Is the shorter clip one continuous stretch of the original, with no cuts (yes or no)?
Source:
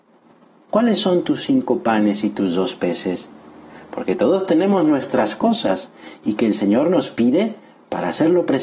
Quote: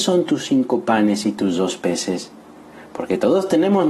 yes